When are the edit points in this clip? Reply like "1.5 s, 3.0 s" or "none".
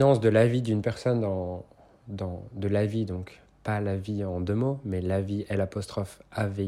none